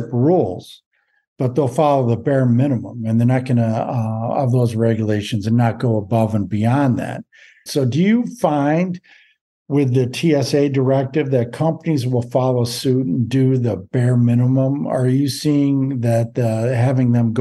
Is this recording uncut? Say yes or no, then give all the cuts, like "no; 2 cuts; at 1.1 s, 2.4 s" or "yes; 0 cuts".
no; 1 cut; at 7.7 s